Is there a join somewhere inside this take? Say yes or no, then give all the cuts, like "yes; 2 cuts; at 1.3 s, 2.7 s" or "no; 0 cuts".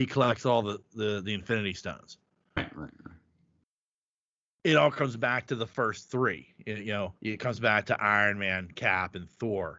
yes; 2 cuts; at 2.6 s, 7.2 s